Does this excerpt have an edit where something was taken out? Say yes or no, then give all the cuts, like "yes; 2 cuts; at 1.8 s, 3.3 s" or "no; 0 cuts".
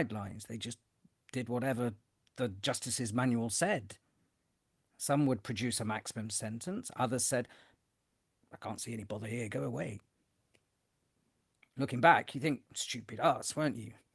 no; 0 cuts